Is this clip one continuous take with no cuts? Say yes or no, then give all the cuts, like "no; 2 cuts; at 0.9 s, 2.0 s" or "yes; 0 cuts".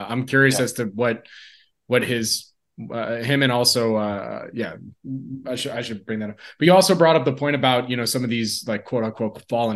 yes; 0 cuts